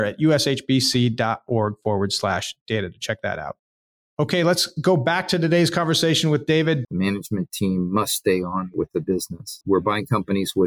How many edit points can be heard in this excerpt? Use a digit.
2